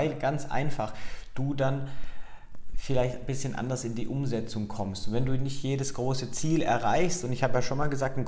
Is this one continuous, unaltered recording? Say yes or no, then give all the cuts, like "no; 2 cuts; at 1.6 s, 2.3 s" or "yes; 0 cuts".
yes; 0 cuts